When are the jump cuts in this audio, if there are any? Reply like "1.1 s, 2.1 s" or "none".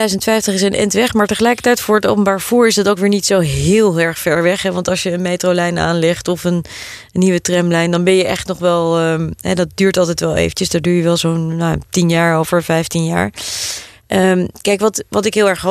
none